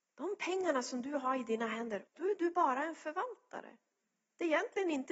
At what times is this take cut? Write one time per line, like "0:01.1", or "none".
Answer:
0:02.1